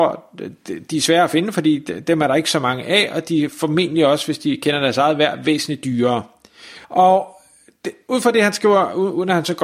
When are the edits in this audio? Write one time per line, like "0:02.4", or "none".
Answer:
0:06.8